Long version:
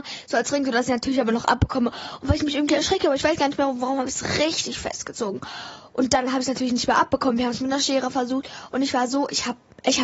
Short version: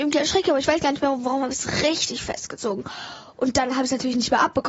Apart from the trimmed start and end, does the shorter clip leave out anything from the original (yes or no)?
no